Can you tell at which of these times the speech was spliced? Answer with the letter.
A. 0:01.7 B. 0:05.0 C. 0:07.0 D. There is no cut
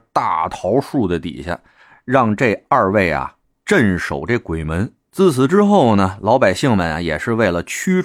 B